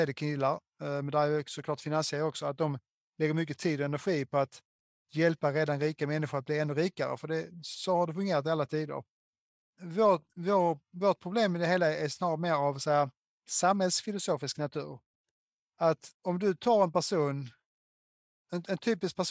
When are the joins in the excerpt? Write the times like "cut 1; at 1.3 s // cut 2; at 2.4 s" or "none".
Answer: cut 1; at 16.1 s